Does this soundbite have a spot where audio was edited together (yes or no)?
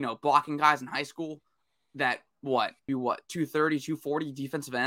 yes